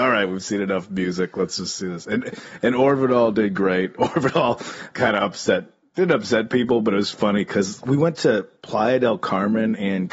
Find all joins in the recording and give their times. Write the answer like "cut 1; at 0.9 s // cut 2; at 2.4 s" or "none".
cut 1; at 4.9 s // cut 2; at 7.8 s